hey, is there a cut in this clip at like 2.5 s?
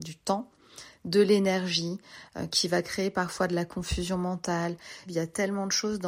no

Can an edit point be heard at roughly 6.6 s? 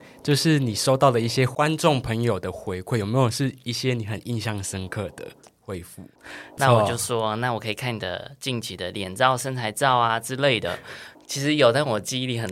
yes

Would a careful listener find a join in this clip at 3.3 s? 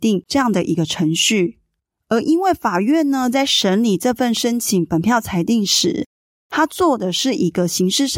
no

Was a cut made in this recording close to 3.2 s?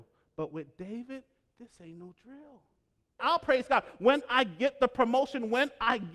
yes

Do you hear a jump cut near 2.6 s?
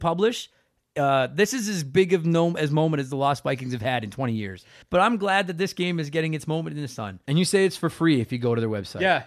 no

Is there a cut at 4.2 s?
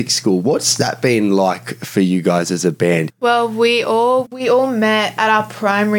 yes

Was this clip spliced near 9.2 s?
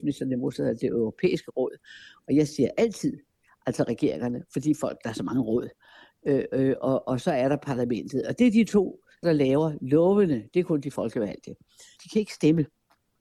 yes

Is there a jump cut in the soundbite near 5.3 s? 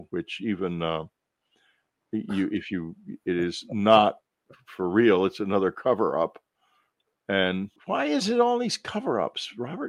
no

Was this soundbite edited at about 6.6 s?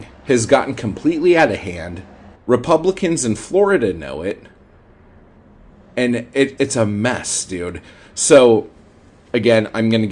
yes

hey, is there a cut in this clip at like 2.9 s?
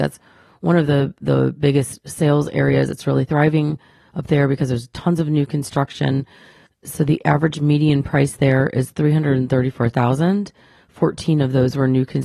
no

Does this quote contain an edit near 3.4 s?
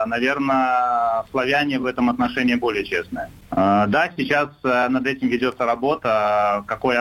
yes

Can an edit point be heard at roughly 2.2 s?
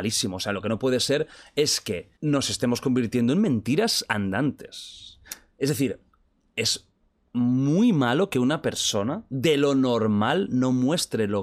yes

